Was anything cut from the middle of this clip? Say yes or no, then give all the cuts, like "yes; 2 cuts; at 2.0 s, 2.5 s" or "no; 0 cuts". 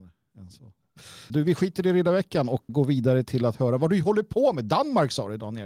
yes; 2 cuts; at 1.3 s, 2.7 s